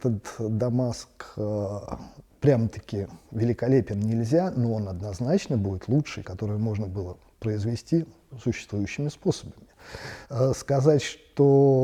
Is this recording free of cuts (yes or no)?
no